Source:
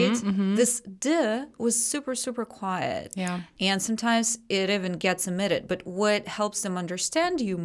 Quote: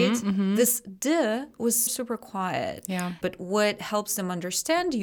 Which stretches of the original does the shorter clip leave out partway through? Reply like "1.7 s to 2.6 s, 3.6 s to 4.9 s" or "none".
1.9 s to 2.1 s, 3.5 s to 5.7 s